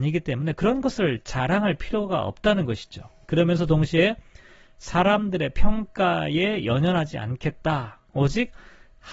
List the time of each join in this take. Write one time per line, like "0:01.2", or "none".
none